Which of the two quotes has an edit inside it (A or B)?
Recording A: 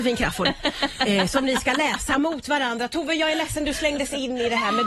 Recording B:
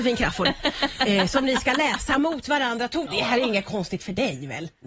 B